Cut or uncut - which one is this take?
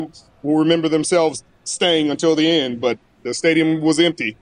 uncut